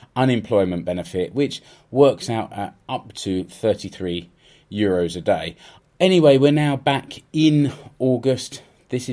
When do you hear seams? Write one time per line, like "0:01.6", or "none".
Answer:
0:05.8